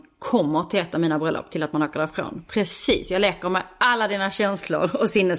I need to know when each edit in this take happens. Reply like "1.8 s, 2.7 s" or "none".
none